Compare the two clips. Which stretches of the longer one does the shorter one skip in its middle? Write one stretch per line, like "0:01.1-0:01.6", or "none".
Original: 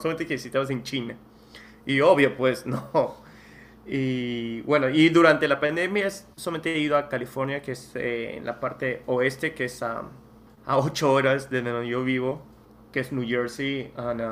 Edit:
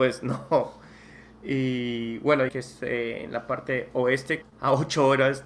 0:04.9-0:07.6
0:09.5-0:10.5

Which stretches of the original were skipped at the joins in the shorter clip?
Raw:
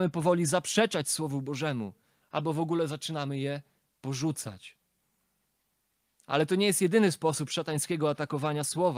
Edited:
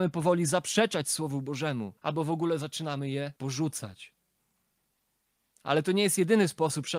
0:02.0-0:02.3
0:03.6-0:04.0

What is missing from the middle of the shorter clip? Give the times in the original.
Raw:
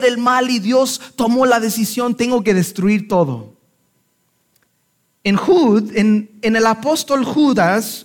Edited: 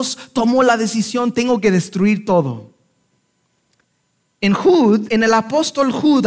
0:05.9-0:06.4

